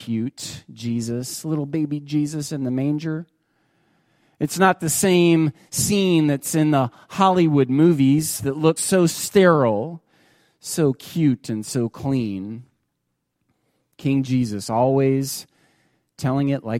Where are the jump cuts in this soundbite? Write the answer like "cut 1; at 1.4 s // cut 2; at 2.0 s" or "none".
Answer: none